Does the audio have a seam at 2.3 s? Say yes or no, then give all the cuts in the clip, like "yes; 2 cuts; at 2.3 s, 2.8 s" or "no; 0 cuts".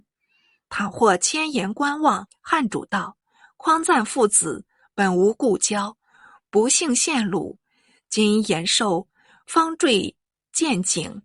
yes; 1 cut; at 2.3 s